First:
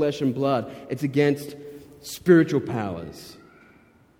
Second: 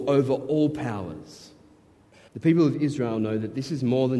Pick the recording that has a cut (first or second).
second